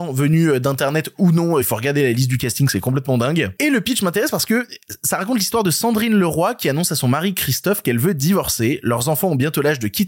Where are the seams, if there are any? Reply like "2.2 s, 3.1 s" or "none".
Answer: none